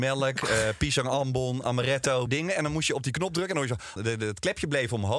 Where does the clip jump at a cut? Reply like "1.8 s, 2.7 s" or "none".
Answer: 2.3 s, 4.0 s